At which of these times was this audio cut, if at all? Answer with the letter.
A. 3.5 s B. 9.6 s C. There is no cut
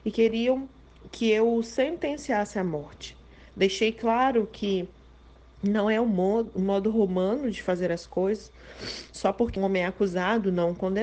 B